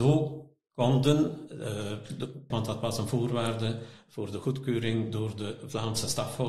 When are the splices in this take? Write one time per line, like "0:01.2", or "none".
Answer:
0:02.5